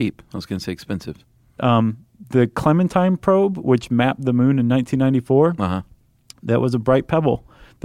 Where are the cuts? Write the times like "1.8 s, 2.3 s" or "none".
1.6 s

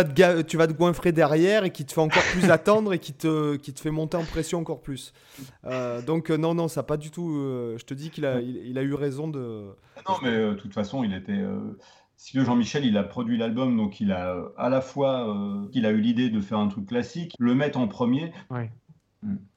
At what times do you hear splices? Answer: 15.7 s, 17.3 s, 18.5 s

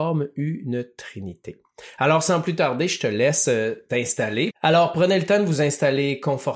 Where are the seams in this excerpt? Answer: 4.5 s

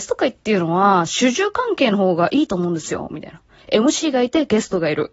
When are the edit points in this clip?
none

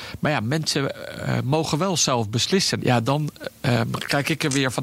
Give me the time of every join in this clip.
2.8 s

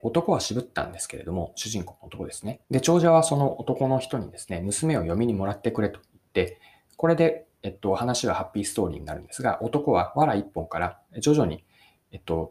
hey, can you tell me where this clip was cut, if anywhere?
2.6 s

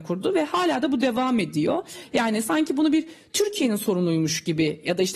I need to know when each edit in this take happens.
none

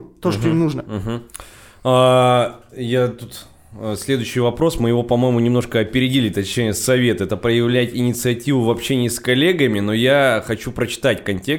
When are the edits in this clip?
none

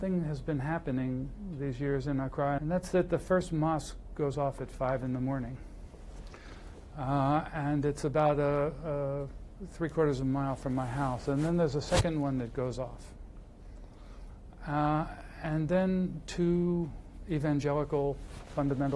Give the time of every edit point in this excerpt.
2.6 s

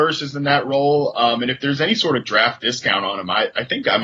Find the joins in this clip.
none

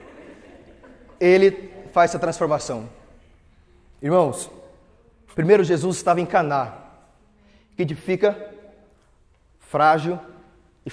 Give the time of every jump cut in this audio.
1.2 s, 5.3 s

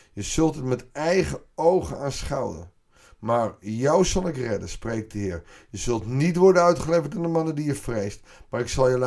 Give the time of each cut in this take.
none

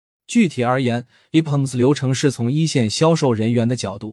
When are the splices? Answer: none

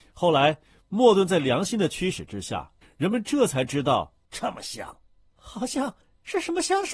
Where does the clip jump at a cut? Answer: 2.8 s, 4.2 s

